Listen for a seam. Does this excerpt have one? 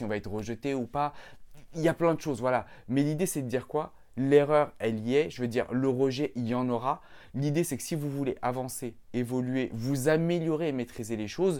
no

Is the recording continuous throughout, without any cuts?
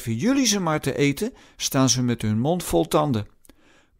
yes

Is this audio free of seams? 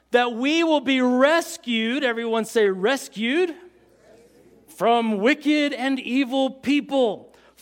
yes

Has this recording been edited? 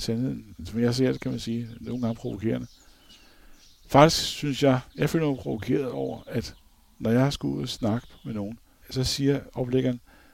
yes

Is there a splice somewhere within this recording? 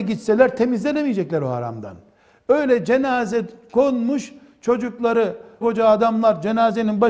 yes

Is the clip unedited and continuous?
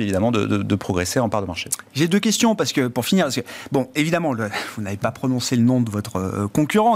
yes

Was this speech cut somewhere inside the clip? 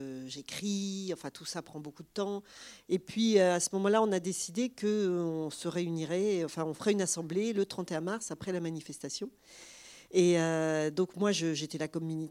yes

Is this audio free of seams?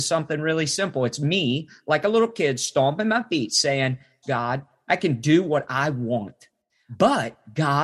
no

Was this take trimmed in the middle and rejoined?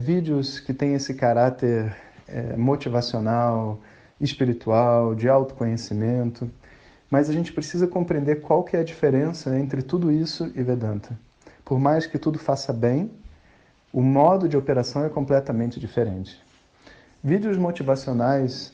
no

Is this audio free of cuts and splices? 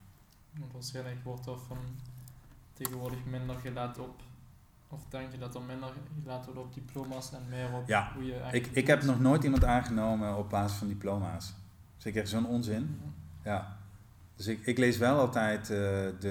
yes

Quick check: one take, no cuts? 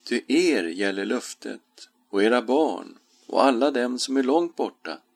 yes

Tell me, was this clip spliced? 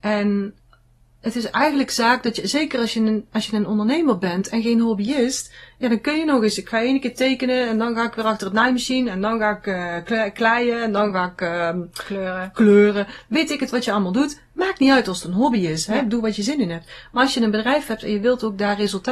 no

